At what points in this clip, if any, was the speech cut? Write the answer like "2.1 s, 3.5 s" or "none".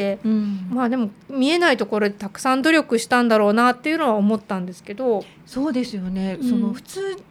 none